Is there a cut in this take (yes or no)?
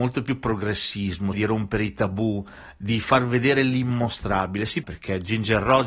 yes